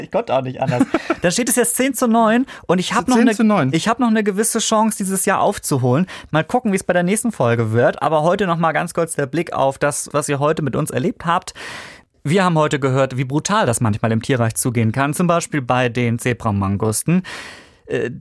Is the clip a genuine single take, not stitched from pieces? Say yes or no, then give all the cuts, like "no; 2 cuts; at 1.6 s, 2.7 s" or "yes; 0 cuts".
no; 2 cuts; at 1.2 s, 6.3 s